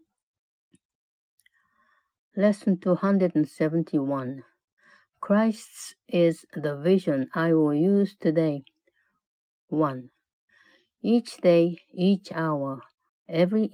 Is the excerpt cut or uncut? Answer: uncut